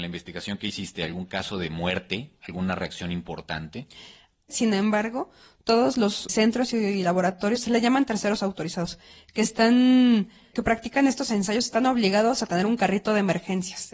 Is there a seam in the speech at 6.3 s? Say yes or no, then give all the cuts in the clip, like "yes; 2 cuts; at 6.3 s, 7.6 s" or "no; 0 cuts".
yes; 3 cuts; at 4.5 s, 6.3 s, 10.5 s